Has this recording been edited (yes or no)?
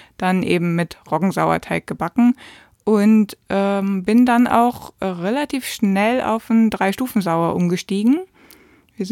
no